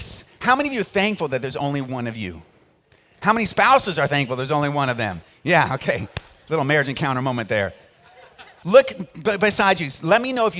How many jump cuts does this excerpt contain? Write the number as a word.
one